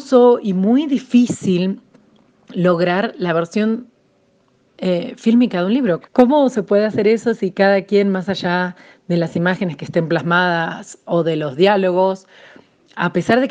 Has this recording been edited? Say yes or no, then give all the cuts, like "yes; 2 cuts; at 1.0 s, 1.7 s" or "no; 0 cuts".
yes; 1 cut; at 6.0 s